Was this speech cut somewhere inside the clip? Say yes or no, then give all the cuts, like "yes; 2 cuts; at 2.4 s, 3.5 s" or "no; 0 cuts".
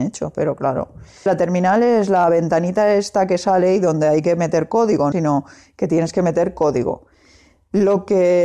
yes; 2 cuts; at 1.3 s, 5.1 s